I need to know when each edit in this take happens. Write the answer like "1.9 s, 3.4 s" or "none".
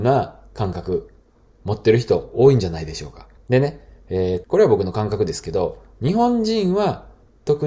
3.4 s, 4.4 s